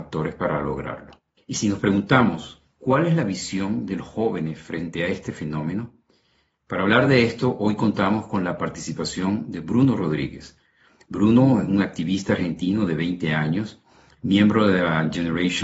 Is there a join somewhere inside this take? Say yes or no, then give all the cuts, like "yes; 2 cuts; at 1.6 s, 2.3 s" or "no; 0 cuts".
no; 0 cuts